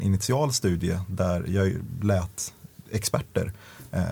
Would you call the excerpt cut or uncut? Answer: uncut